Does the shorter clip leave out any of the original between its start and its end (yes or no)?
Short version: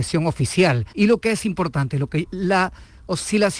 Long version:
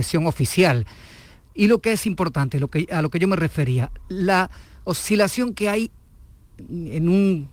yes